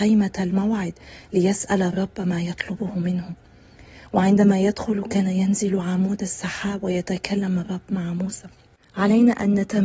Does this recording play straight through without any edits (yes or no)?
yes